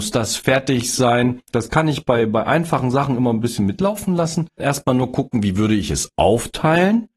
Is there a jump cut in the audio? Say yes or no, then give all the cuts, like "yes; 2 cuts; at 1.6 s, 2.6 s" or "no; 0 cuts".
yes; 2 cuts; at 1.4 s, 4.6 s